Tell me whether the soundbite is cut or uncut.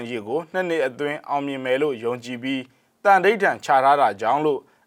uncut